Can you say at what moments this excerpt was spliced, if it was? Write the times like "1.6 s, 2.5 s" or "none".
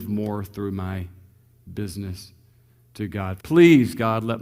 3.4 s